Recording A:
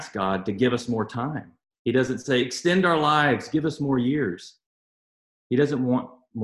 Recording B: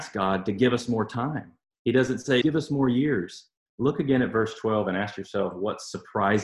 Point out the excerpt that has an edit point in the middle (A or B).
B